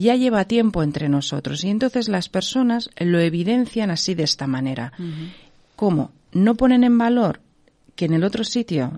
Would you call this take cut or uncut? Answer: uncut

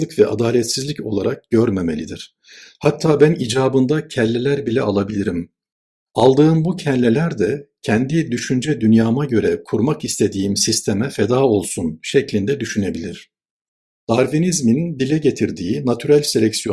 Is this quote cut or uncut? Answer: cut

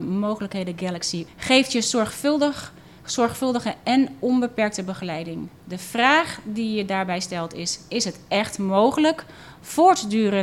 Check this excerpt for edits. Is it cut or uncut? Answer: cut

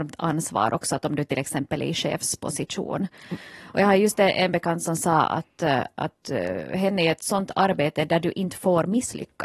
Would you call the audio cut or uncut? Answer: uncut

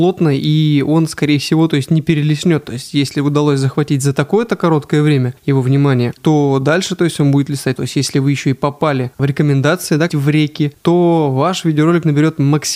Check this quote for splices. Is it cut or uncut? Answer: cut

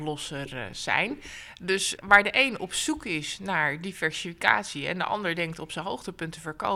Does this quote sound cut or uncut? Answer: cut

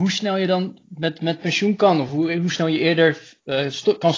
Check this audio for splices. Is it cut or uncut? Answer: uncut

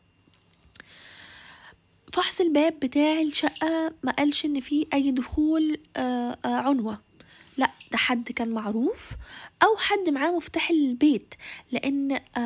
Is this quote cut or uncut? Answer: uncut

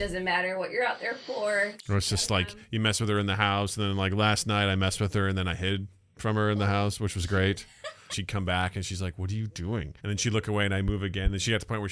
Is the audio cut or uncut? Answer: cut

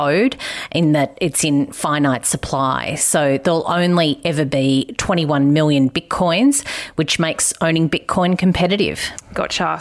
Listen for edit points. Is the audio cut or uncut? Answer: uncut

